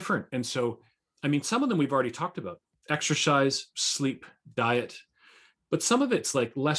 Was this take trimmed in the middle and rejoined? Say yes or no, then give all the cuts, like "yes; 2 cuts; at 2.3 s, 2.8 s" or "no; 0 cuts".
no; 0 cuts